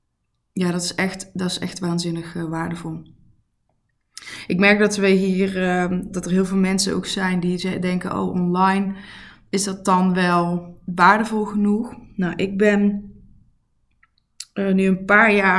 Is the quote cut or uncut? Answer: cut